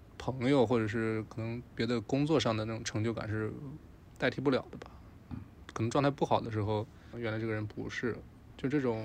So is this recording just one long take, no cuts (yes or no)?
no